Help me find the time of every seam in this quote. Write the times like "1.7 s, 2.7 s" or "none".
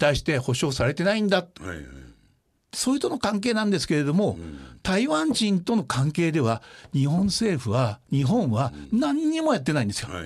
1.6 s